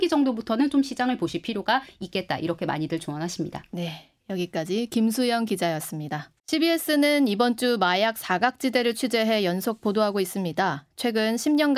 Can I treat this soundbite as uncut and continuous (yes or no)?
no